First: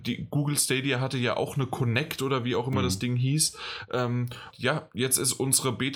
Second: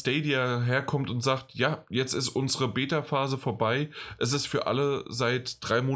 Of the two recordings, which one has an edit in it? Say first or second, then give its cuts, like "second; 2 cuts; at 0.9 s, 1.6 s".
first; 1 cut; at 4.5 s